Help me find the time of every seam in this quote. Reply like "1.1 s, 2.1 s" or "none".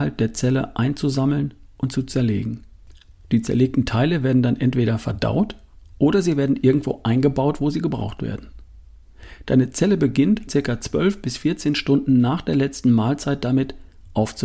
10.5 s